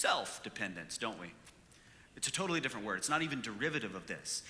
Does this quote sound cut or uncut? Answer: cut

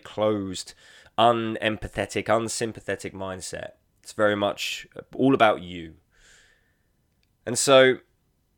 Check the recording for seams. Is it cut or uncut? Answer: uncut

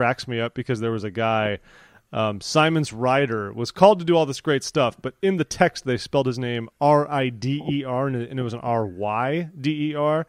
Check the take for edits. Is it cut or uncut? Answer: uncut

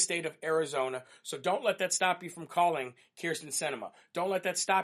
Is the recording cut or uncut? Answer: uncut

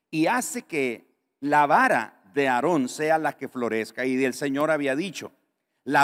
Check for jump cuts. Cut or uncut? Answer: uncut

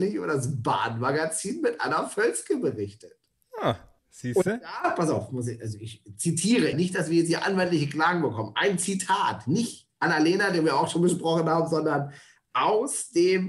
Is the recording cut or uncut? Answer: cut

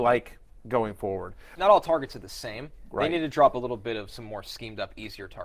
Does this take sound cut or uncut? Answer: cut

